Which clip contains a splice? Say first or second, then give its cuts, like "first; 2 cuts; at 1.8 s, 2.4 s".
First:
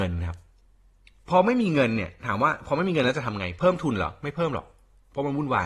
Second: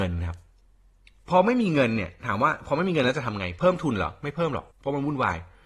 second; 1 cut; at 4.7 s